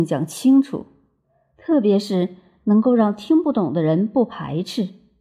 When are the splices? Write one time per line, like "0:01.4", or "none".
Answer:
none